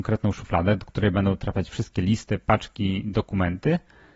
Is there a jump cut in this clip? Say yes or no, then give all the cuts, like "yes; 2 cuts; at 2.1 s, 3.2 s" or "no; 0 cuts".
no; 0 cuts